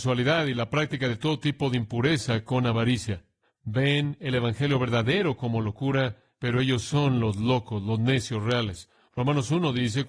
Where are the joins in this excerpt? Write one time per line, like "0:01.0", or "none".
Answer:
0:03.4